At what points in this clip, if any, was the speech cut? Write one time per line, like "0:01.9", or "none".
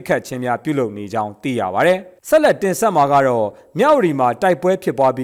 0:02.2